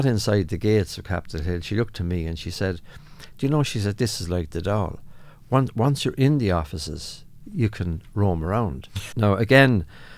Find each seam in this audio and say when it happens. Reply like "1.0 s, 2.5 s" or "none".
9.1 s